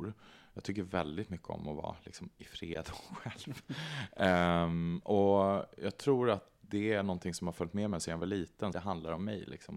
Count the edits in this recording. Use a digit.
1